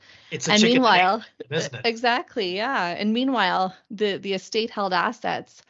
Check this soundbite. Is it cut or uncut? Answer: uncut